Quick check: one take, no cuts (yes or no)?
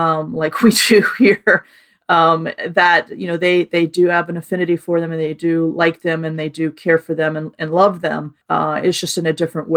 no